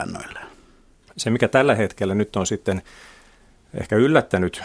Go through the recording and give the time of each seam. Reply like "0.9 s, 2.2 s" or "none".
1.1 s